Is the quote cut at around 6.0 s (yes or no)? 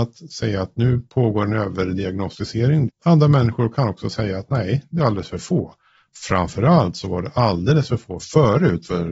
no